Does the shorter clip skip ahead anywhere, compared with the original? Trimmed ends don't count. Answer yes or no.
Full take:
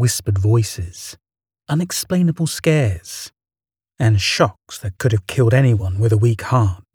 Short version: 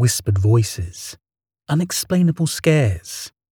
no